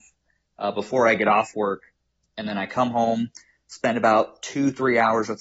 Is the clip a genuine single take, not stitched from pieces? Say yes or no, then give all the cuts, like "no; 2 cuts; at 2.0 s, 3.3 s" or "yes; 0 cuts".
yes; 0 cuts